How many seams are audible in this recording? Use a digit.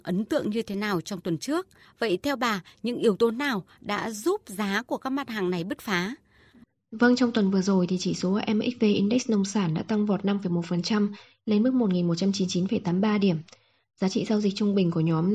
0